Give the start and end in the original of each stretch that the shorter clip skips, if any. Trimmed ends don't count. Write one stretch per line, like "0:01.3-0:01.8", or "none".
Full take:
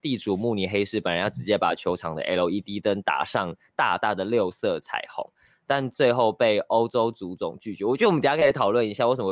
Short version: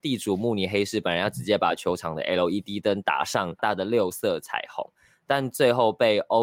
0:03.6-0:04.0